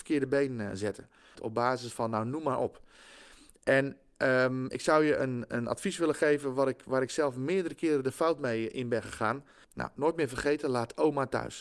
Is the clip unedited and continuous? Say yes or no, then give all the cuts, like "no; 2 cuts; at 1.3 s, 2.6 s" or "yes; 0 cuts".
no; 2 cuts; at 1.4 s, 9.6 s